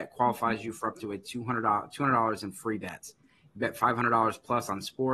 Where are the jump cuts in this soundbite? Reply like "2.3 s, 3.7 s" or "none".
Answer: 3.2 s